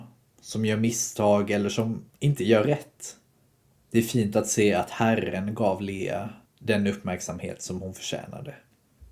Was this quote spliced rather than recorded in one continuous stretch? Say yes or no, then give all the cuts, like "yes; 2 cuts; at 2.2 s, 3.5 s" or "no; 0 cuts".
no; 0 cuts